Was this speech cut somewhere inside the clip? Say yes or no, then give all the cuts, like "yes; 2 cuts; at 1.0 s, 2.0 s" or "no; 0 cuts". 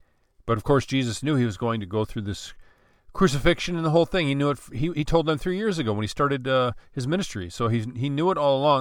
no; 0 cuts